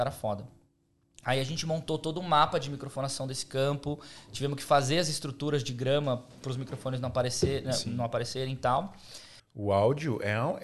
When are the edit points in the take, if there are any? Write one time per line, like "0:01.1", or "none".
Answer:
0:09.4

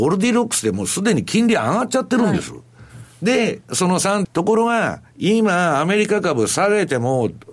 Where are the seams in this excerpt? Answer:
0:04.2

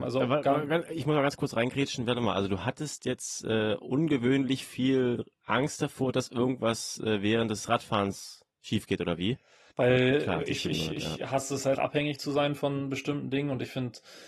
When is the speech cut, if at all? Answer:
0:09.7
0:11.7

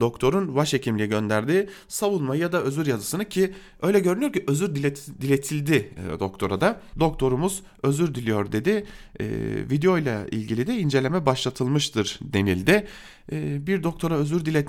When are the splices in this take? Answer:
0:06.9

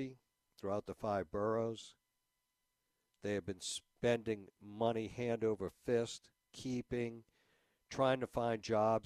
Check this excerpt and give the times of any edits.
0:06.4

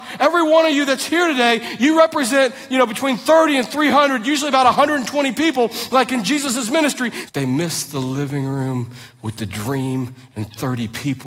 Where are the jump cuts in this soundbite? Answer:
0:07.3

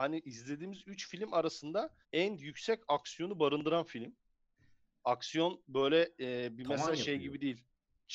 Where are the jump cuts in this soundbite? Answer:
0:02.0

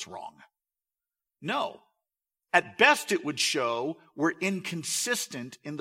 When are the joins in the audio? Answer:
0:01.3

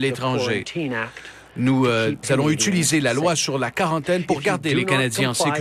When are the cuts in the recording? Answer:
0:02.2

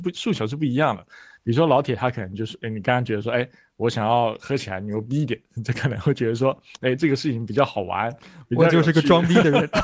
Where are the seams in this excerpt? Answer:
none

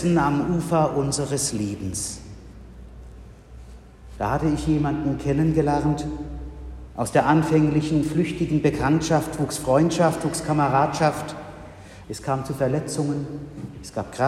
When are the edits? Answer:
0:12.0

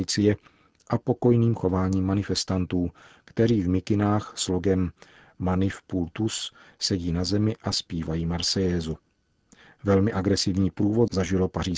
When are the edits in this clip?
none

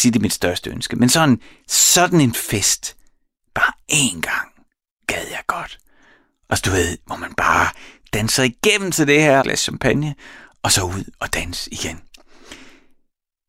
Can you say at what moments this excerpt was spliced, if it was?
0:09.4

